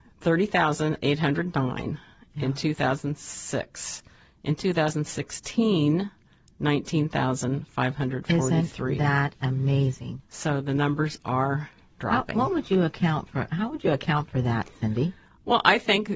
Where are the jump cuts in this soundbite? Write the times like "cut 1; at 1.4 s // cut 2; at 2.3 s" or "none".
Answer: none